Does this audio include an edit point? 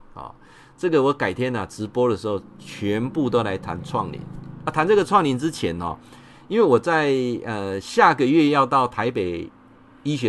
no; 0 cuts

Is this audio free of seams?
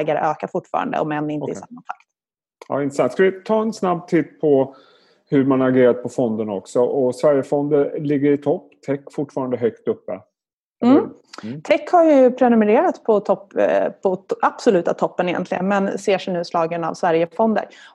yes; 0 cuts

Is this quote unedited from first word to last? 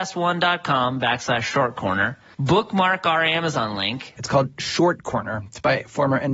no; 2 cuts; at 2.3 s, 4.2 s

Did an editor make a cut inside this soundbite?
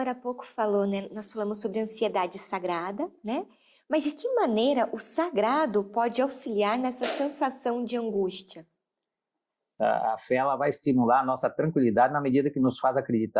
yes; 1 cut; at 3.2 s

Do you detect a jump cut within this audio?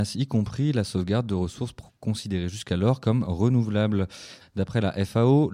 yes; 1 cut; at 4.4 s

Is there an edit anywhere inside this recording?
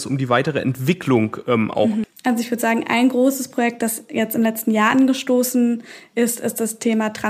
yes; 1 cut; at 2.0 s

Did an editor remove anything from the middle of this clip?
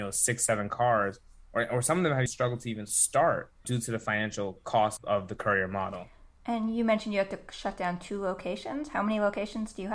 yes; 3 cuts; at 2.3 s, 3.6 s, 5.0 s

